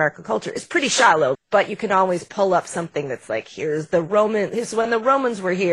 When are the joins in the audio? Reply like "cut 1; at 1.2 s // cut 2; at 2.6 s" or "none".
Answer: cut 1; at 1.3 s